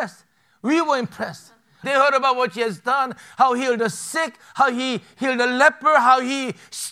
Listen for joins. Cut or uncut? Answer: cut